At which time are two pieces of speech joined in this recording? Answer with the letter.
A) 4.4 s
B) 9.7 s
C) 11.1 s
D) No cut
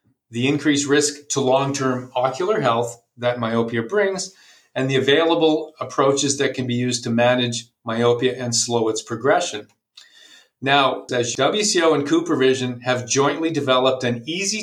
C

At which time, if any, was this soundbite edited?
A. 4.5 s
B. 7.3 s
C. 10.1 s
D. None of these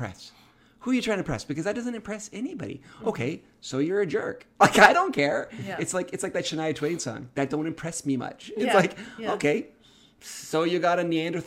D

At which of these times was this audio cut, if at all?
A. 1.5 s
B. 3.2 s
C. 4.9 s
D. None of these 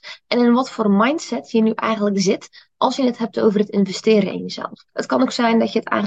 C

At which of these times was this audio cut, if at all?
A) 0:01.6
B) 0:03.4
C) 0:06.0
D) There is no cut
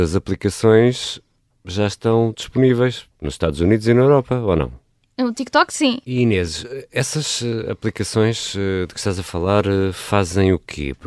C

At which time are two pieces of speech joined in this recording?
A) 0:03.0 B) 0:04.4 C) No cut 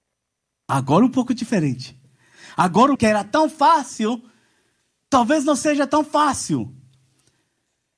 A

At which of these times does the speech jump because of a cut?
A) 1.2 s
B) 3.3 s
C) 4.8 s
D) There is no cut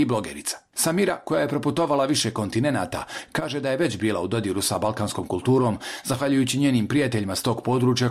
D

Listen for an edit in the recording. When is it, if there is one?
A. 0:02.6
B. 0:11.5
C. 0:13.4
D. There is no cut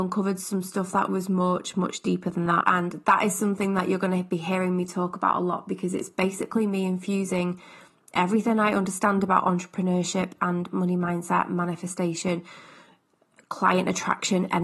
A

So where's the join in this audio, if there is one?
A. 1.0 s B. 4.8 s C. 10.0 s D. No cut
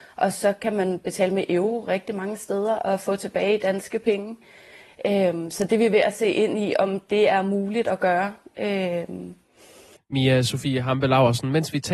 C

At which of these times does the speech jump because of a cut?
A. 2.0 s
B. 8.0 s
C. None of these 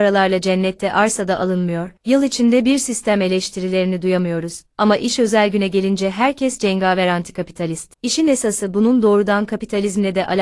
A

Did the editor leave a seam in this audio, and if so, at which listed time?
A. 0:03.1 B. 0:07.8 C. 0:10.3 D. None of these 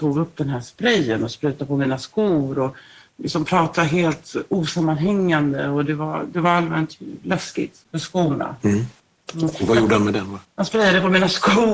B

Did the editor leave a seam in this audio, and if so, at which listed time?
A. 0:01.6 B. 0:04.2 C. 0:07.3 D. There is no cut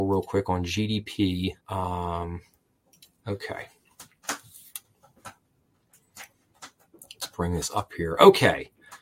A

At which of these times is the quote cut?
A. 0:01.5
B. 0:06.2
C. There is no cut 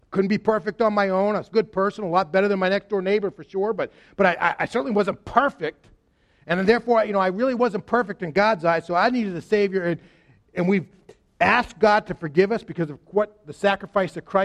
A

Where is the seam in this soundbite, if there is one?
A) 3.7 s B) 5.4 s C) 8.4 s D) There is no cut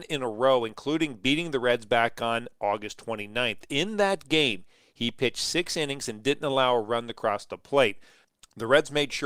D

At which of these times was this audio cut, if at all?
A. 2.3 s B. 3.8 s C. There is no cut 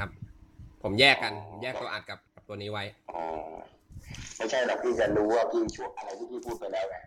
A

